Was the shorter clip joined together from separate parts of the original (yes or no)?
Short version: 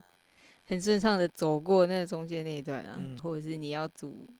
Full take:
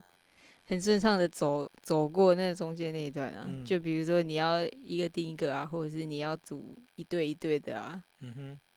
yes